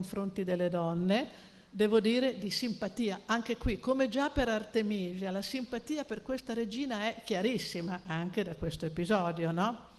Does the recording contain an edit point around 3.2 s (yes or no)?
no